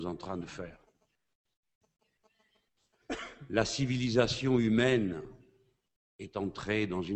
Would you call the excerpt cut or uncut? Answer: uncut